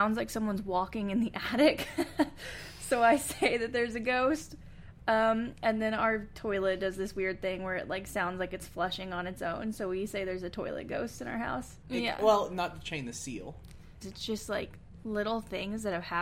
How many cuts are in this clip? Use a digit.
2